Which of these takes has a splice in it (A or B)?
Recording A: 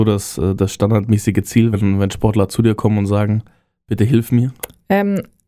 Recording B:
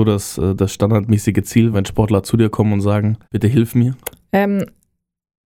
B